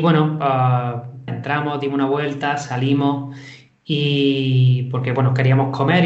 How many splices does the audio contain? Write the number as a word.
one